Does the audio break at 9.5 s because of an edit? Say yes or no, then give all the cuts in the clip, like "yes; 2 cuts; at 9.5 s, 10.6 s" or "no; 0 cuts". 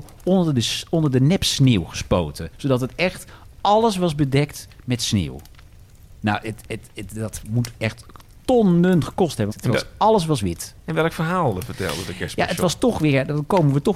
yes; 1 cut; at 9.5 s